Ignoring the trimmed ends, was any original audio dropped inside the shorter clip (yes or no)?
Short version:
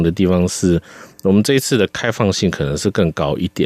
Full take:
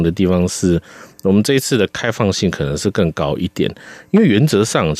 no